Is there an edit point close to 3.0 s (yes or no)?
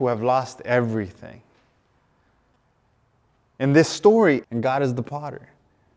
no